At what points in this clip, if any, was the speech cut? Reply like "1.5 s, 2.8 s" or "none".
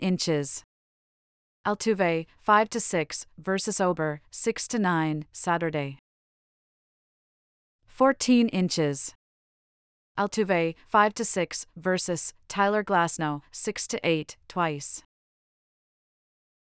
none